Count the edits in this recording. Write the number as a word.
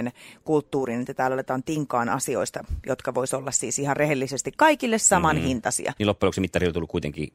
one